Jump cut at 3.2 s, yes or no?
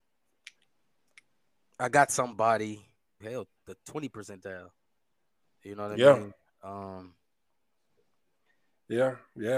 yes